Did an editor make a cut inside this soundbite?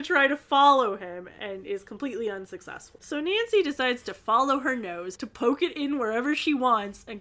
no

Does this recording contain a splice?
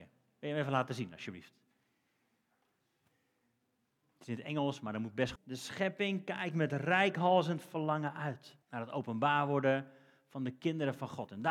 yes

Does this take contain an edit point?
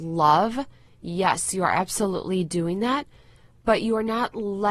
no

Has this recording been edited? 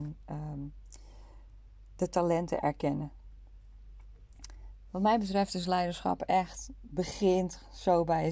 no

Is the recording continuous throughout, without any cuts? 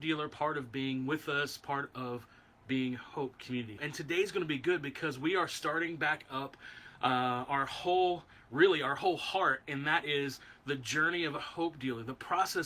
no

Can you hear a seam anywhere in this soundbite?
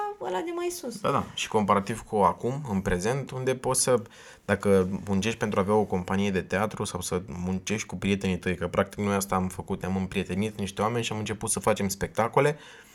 no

